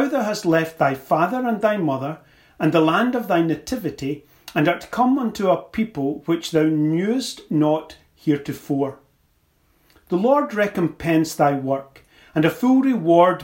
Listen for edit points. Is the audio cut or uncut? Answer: uncut